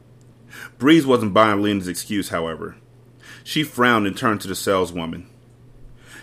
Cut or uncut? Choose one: uncut